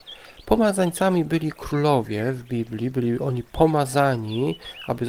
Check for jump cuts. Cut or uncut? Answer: uncut